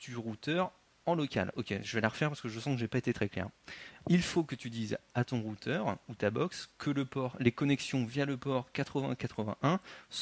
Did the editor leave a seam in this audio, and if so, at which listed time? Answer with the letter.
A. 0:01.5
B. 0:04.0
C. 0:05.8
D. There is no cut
D